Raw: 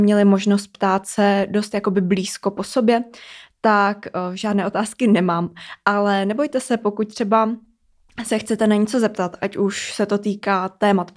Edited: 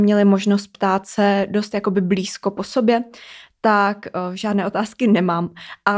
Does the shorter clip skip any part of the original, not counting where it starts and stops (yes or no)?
no